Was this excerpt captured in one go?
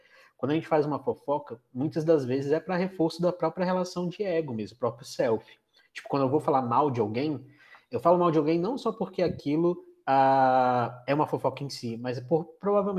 yes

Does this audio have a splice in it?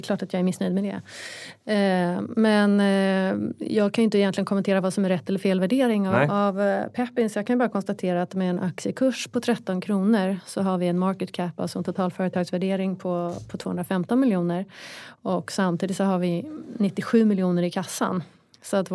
no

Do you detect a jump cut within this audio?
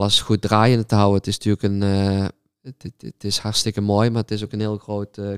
no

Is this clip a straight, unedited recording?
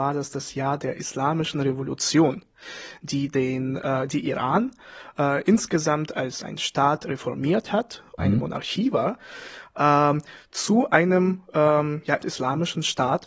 no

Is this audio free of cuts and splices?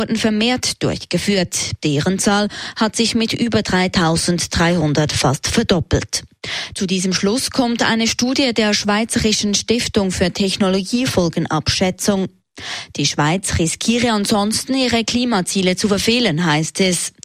no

